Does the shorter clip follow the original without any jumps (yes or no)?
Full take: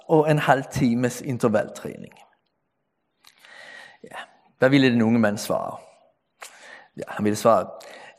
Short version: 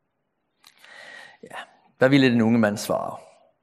yes